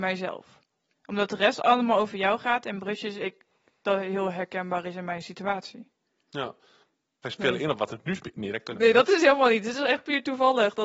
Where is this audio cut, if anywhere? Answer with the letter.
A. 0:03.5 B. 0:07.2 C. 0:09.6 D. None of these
B